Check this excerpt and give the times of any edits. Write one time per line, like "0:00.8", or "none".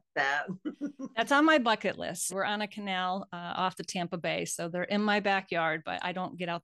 0:02.3